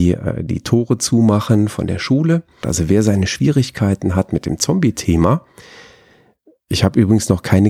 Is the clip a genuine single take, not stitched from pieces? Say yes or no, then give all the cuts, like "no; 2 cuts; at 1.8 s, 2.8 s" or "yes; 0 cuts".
no; 1 cut; at 2.6 s